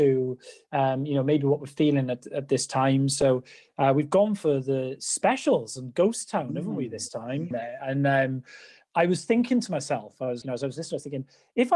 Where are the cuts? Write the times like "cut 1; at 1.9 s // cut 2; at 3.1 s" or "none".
cut 1; at 7.5 s // cut 2; at 10.4 s